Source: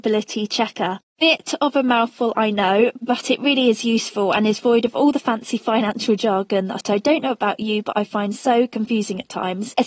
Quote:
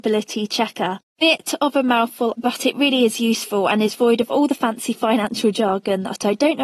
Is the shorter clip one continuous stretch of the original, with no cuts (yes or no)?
no